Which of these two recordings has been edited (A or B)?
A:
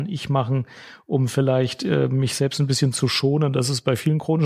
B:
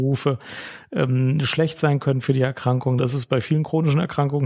B